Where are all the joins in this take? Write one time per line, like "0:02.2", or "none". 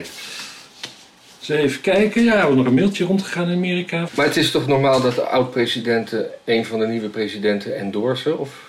0:04.1